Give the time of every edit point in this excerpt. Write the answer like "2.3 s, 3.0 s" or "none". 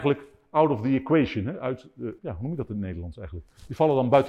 2.2 s